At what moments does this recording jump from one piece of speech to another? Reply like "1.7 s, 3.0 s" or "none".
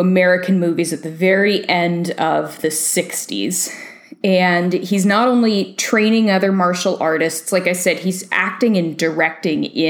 none